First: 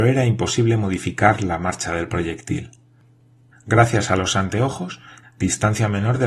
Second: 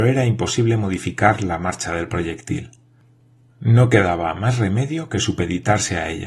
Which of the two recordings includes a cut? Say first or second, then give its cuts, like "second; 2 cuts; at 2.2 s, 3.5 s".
first; 2 cuts; at 3.5 s, 5.2 s